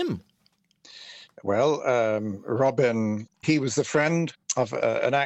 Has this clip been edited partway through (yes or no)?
yes